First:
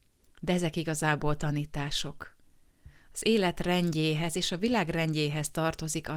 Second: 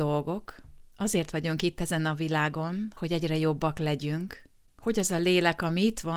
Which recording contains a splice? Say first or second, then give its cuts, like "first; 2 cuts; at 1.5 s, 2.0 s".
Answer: second; 1 cut; at 3.0 s